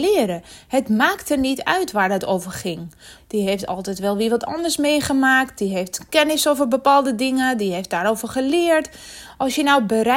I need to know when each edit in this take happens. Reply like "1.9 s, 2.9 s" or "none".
3.1 s